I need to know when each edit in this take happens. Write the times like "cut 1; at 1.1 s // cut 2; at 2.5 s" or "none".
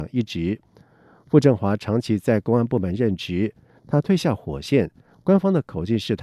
none